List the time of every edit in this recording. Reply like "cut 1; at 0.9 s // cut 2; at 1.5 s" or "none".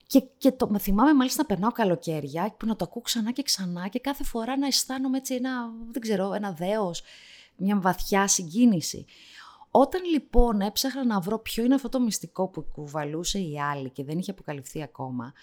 none